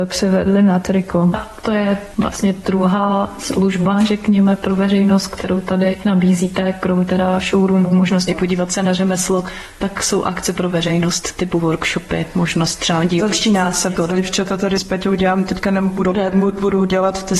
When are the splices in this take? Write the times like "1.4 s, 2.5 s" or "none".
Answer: none